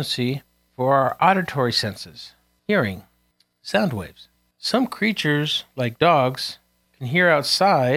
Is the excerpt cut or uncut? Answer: uncut